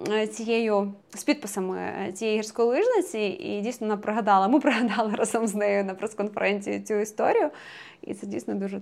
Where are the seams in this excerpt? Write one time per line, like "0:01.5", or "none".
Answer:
0:01.0